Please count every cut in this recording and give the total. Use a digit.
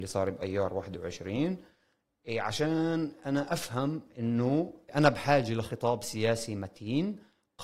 0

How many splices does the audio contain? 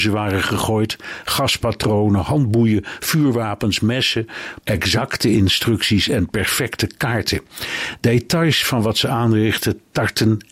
1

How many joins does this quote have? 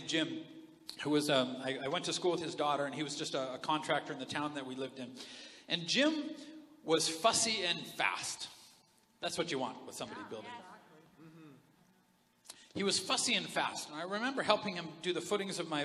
0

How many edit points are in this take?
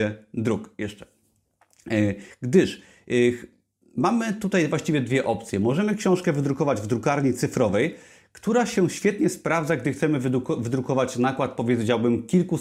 1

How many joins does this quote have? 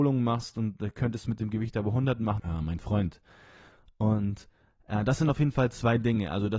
1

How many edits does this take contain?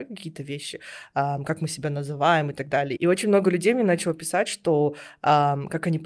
1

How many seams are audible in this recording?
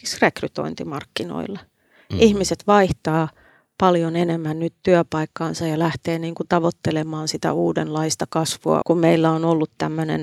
1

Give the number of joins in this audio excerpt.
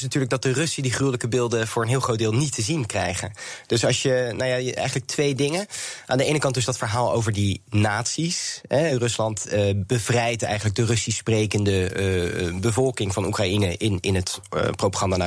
0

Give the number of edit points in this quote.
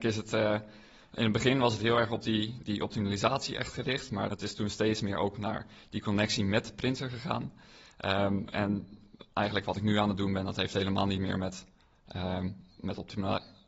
1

